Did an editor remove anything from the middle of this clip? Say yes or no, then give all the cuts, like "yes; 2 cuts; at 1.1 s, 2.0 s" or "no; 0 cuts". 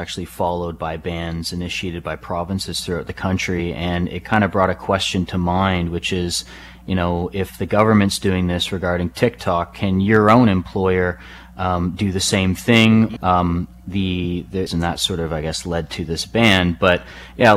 yes; 2 cuts; at 13.2 s, 14.7 s